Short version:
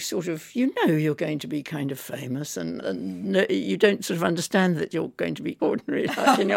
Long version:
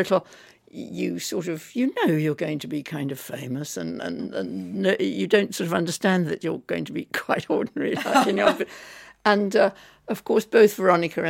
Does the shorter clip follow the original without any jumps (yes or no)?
no